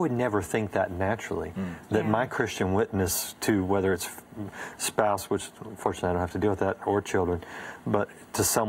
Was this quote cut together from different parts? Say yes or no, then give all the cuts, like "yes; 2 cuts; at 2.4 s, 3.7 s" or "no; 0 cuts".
no; 0 cuts